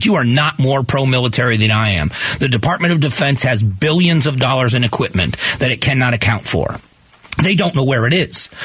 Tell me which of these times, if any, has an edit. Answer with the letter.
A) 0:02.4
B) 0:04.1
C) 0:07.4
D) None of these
D